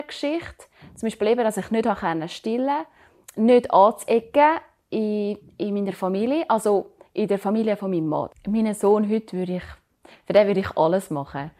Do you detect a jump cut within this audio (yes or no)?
yes